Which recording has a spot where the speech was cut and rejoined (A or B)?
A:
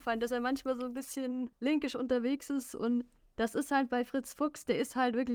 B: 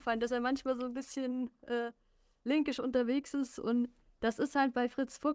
A